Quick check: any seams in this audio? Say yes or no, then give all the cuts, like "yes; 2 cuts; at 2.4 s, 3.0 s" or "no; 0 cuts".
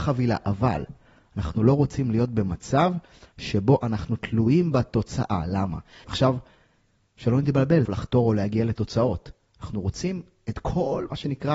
yes; 2 cuts; at 6.0 s, 7.8 s